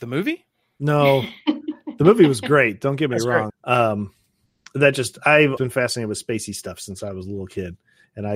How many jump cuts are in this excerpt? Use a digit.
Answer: 2